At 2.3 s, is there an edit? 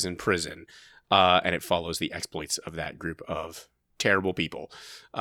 no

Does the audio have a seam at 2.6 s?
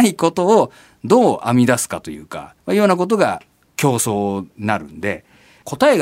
yes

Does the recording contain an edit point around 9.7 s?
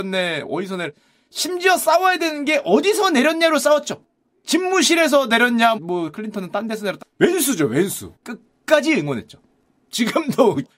no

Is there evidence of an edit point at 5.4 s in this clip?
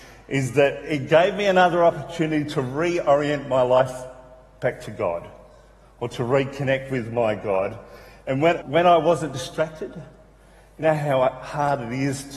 no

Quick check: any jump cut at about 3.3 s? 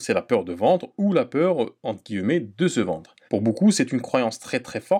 yes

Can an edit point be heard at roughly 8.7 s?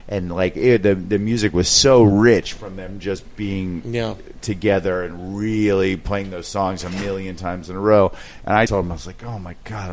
yes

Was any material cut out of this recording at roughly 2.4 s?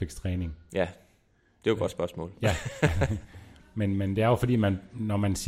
no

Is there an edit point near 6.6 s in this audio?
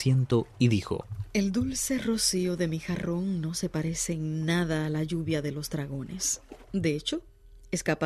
yes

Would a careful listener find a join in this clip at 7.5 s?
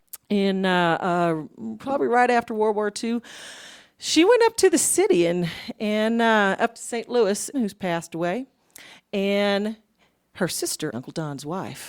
yes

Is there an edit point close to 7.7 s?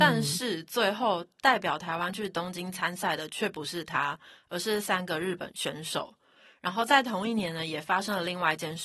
no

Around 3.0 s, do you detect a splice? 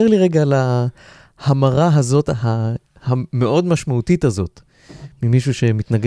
no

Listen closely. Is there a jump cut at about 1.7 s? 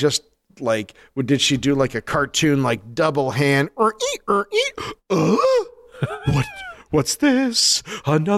no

